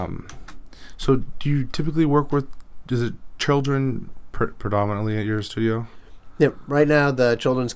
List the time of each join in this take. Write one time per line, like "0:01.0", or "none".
none